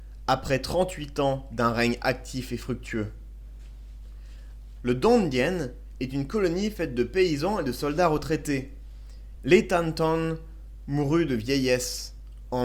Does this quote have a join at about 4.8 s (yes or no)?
yes